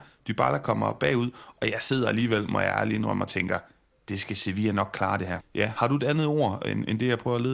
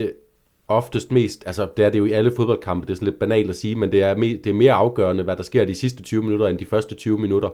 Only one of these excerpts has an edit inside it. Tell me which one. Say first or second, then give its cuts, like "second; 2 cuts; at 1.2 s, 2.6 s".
first; 1 cut; at 5.4 s